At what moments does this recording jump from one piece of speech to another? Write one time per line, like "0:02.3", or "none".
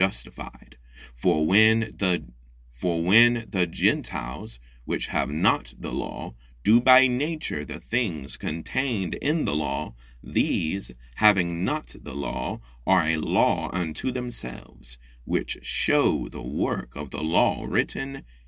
none